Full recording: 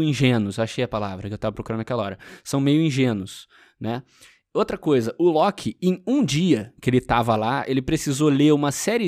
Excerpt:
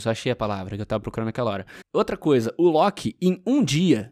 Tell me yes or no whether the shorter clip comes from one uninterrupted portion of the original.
no